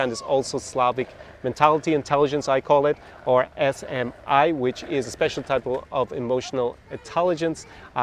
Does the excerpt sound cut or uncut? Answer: uncut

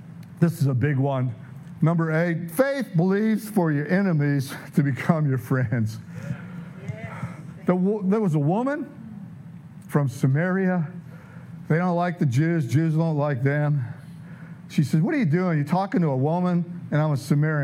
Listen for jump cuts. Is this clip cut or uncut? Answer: cut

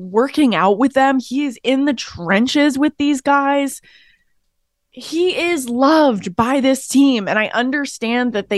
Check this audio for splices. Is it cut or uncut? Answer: uncut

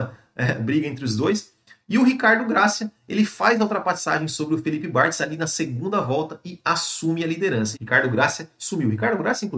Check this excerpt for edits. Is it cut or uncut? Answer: cut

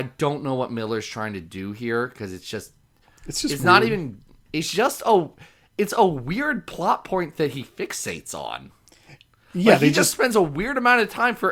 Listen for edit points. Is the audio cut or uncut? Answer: cut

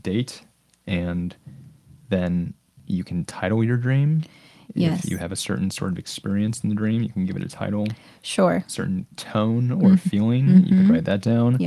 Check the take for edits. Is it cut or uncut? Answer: uncut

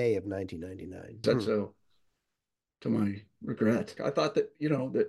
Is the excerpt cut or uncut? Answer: cut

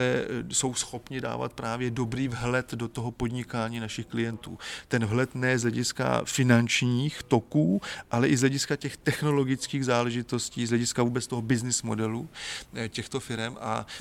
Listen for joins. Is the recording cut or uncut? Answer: uncut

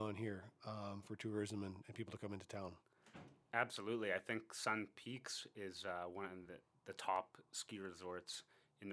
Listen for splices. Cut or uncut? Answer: uncut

